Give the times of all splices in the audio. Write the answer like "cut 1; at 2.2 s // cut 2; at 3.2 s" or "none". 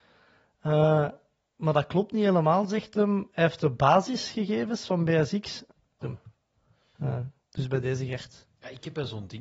cut 1; at 6.0 s